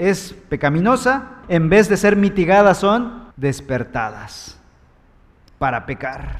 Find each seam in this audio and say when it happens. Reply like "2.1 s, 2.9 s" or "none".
1.4 s, 3.3 s